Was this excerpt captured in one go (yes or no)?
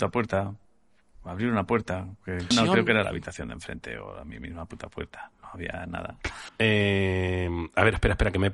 no